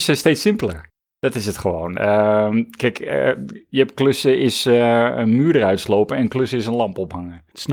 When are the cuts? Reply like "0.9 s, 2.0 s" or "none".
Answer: none